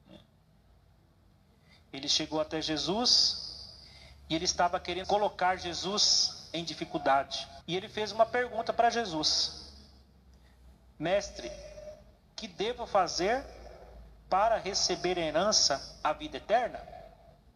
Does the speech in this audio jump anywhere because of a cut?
yes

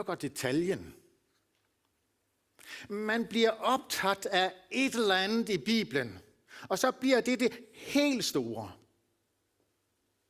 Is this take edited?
no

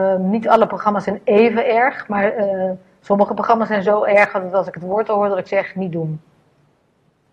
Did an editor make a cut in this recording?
no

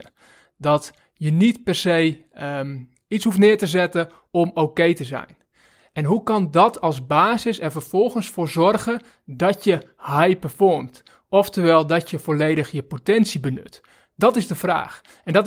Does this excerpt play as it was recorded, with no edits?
yes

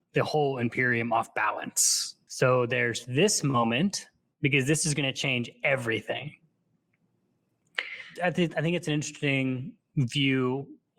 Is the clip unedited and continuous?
no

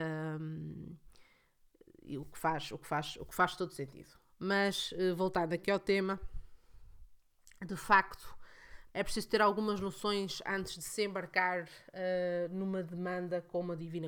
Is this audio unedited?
no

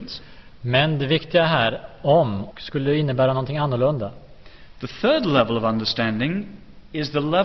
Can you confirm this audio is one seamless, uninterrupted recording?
no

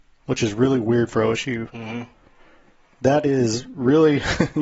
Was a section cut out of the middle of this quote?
no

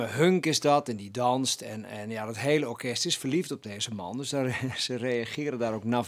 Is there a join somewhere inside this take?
no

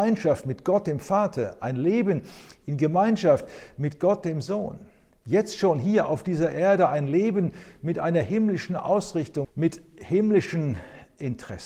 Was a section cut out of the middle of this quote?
yes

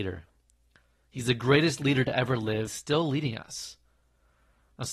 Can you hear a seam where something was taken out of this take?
yes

